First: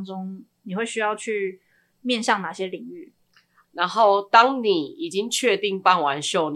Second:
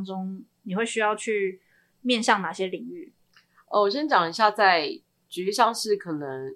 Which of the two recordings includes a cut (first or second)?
first